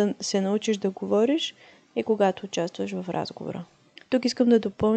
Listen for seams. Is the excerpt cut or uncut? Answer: cut